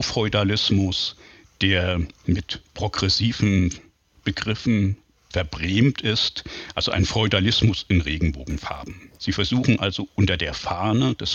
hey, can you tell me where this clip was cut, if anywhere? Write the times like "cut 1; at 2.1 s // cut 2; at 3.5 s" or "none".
cut 1; at 9.1 s